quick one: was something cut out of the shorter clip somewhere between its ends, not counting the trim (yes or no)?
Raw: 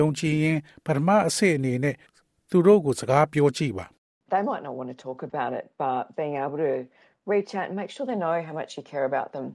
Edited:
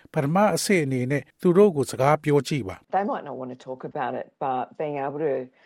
yes